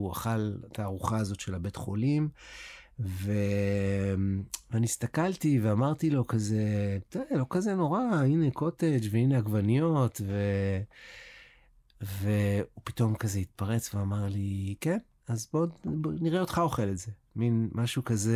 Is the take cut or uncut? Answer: uncut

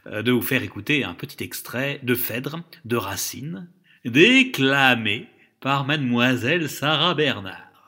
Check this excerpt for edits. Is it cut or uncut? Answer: uncut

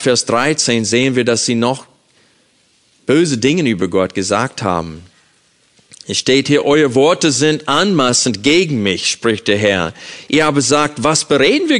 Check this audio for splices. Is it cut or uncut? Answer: uncut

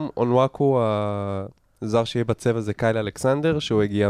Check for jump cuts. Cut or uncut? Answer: uncut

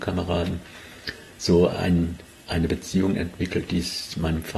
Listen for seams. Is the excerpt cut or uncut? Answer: uncut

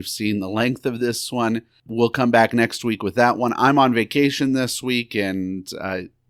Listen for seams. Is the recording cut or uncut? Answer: uncut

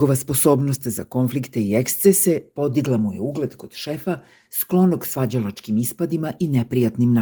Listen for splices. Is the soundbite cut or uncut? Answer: uncut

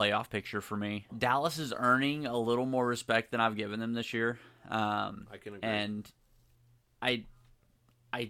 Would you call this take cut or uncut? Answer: cut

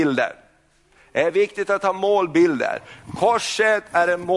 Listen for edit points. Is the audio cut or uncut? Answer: uncut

